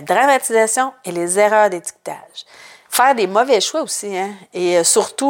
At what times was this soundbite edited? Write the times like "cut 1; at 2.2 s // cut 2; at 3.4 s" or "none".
cut 1; at 2.8 s